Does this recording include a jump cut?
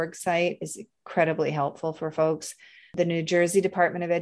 no; 0 cuts

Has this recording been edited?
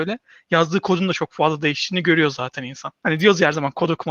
yes; 1 cut; at 3.0 s

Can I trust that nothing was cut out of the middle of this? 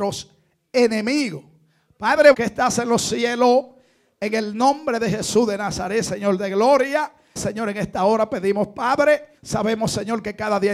no; 3 cuts; at 2.3 s, 7.4 s, 9.4 s

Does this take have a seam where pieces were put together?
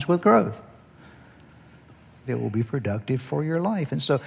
yes; 1 cut; at 2.3 s

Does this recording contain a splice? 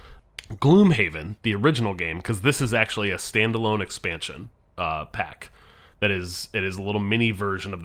no; 0 cuts

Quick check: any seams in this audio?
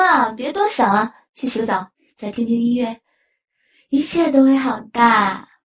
no; 0 cuts

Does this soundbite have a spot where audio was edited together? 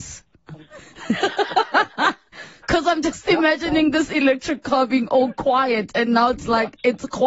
no; 0 cuts

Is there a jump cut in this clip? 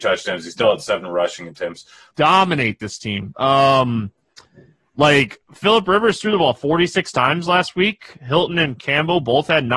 yes; 1 cut; at 2.1 s

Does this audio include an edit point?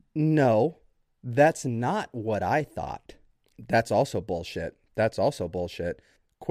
yes; 1 cut; at 3.5 s

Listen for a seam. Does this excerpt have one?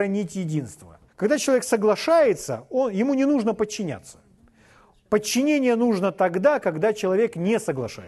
yes; 1 cut; at 1.1 s

